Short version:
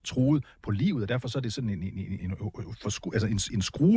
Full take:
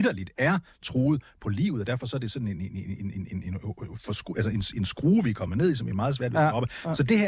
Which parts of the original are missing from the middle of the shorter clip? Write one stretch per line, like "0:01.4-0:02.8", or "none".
0:03.0-0:03.4

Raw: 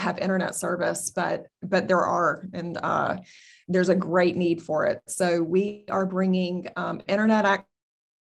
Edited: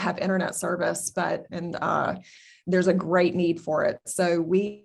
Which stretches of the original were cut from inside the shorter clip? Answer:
0:01.5-0:02.5

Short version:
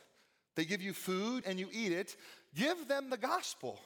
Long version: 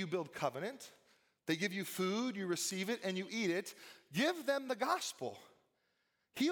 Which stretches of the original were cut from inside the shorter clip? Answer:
0:02.3-0:03.0

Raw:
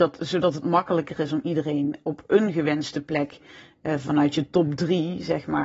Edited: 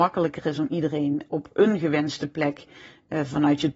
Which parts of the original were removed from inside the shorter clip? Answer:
none

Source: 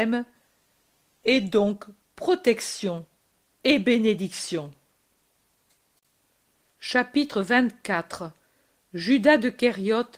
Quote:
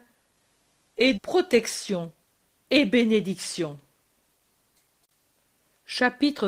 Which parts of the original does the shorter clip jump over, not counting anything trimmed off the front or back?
0:01.4-0:02.1

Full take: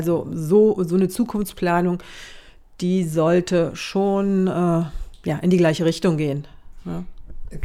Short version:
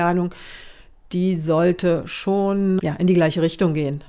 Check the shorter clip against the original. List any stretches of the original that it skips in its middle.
0:04.5-0:05.2

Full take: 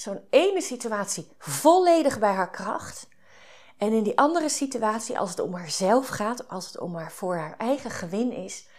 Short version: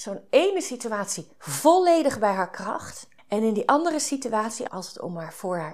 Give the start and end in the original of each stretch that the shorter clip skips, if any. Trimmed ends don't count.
0:03.2-0:03.7
0:05.2-0:06.5

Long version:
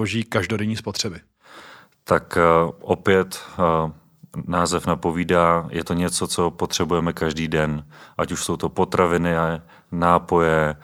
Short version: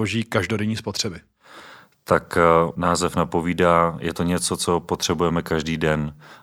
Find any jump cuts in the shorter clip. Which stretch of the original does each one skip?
0:02.8-0:04.5

